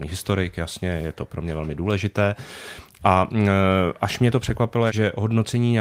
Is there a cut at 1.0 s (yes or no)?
no